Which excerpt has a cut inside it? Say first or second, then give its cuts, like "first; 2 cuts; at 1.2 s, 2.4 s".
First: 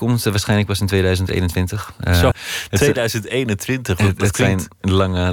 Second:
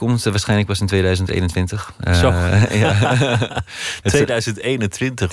first; 1 cut; at 2.3 s